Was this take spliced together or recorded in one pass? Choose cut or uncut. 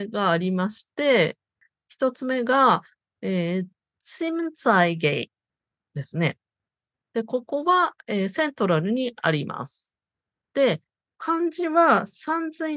uncut